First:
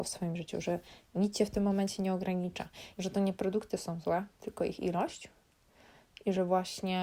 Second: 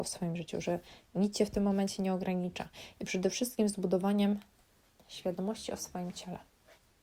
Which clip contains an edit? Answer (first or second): first